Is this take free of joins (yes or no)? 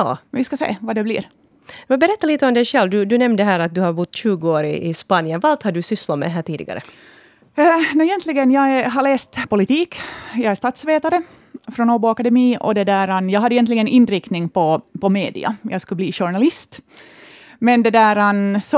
no